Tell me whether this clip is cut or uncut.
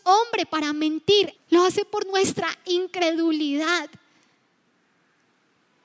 cut